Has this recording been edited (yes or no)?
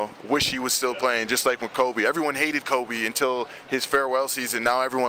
no